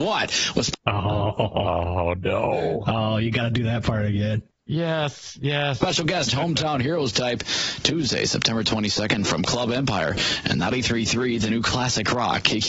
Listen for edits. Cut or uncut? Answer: cut